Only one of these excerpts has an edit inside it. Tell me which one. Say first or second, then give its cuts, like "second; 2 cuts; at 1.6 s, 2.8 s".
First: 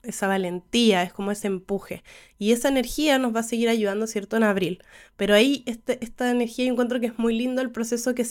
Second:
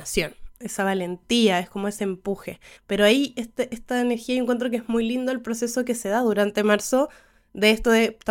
second; 1 cut; at 2.8 s